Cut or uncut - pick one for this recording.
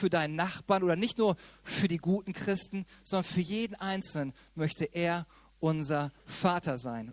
uncut